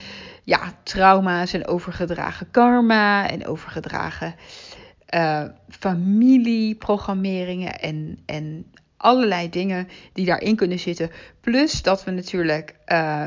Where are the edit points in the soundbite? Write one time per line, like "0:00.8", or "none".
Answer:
none